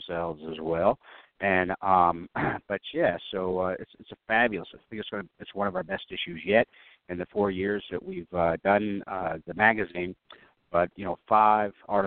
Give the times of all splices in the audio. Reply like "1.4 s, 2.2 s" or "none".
none